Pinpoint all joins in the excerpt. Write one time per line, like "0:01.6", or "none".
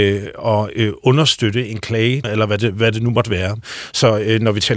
0:02.2